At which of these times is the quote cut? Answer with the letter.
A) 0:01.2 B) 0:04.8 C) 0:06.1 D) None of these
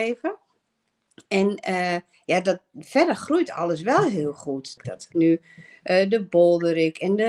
B